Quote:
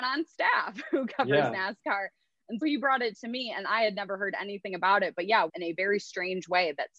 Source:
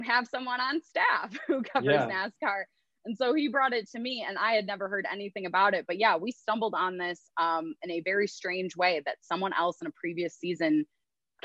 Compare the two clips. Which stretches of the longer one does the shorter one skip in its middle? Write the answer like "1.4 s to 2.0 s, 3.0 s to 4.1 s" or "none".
3.2 s to 3.3 s, 6.2 s to 7.8 s